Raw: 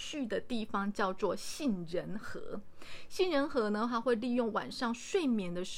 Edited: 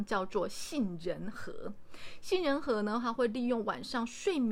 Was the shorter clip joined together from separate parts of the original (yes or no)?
no